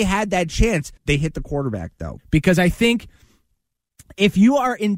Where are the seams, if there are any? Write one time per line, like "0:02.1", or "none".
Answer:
0:01.0
0:02.2